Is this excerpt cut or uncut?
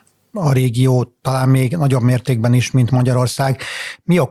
uncut